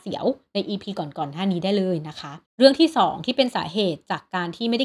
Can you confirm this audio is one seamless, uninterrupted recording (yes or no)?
no